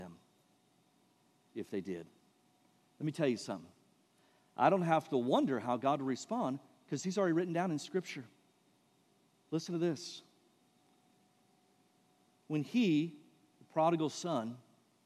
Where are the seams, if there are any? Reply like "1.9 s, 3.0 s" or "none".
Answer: none

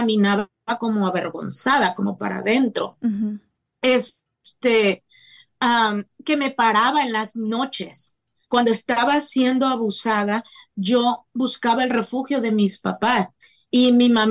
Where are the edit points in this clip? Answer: none

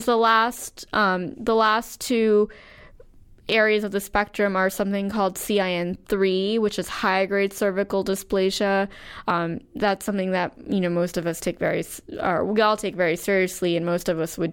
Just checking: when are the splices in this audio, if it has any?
9.2 s

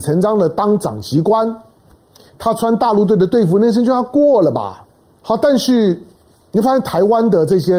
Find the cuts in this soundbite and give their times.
5.2 s

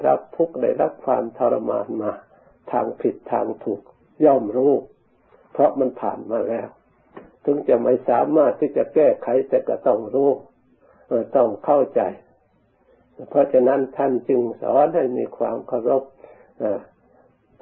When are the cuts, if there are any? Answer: none

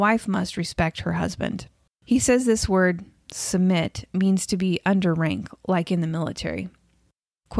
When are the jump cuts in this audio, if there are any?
1.9 s

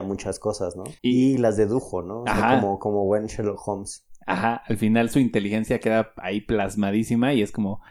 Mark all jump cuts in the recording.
1.0 s

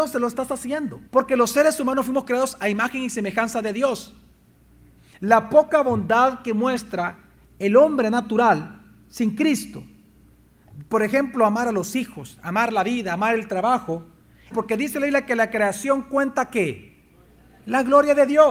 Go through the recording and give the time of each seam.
1.1 s, 14.5 s

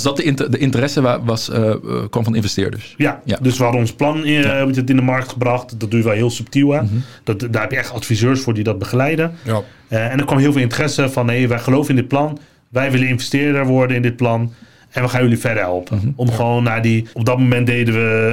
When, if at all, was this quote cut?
17.1 s

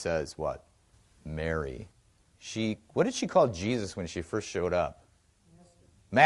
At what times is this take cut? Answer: 2.3 s

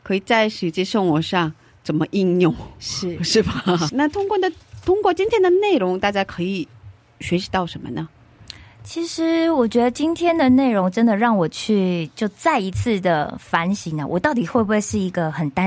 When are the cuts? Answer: 3.9 s

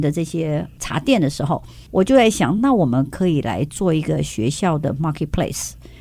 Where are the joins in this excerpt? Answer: none

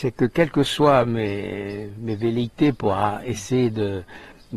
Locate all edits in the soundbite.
none

